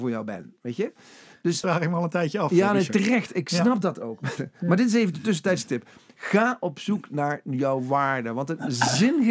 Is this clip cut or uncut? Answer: cut